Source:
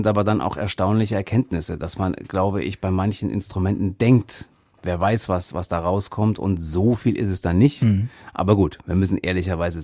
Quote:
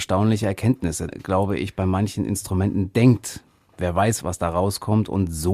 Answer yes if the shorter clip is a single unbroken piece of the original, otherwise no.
no